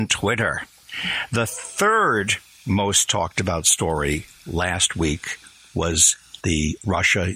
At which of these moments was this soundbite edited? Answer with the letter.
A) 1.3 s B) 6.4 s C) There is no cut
B